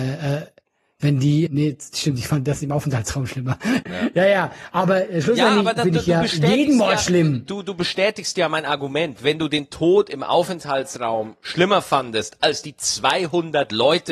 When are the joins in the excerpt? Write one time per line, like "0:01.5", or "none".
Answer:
0:01.5
0:03.8